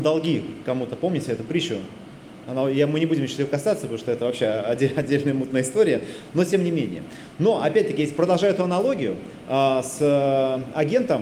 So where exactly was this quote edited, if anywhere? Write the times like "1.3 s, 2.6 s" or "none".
none